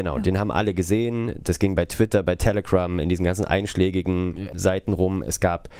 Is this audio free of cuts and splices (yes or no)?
yes